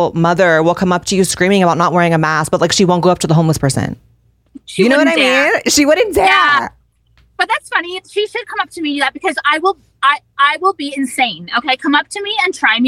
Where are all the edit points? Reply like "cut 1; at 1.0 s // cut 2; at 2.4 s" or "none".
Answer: none